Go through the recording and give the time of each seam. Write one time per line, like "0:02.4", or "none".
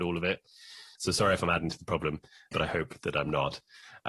0:01.0
0:02.5